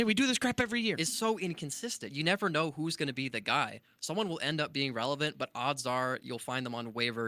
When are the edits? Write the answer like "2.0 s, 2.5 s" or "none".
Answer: none

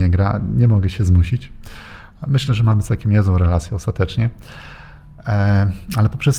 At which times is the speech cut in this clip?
none

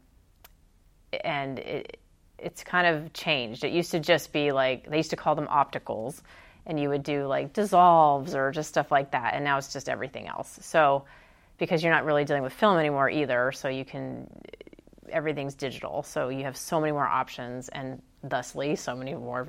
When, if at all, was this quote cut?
none

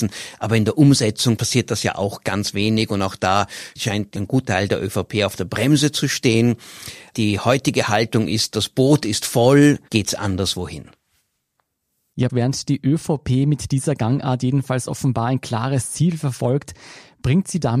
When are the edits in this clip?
9.9 s, 12.3 s

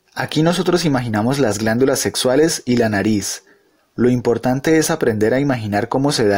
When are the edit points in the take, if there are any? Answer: none

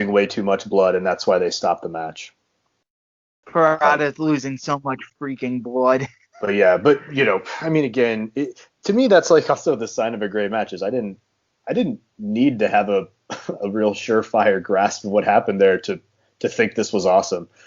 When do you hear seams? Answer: 3.4 s

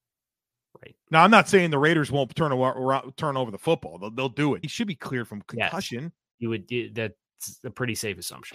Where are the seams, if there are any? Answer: 4.6 s

